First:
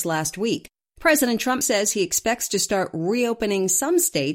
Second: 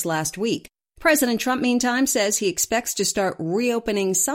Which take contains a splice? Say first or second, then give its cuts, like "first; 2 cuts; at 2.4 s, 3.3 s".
first; 1 cut; at 1.6 s